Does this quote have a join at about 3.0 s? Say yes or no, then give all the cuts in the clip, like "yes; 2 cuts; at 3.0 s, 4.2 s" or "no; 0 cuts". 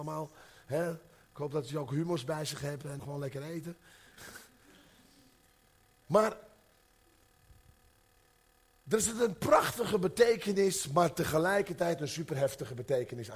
yes; 1 cut; at 3.0 s